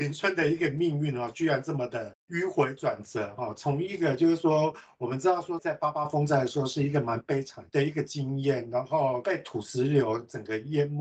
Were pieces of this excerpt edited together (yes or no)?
yes